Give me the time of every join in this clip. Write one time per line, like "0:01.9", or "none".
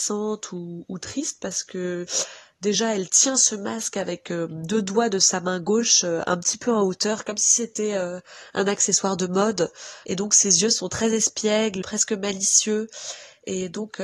0:10.0
0:11.8